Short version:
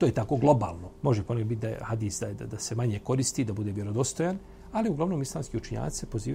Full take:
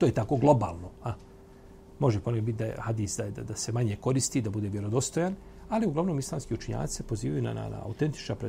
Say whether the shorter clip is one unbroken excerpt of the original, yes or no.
no